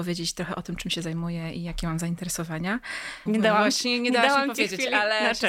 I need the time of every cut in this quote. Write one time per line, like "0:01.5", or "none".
0:03.3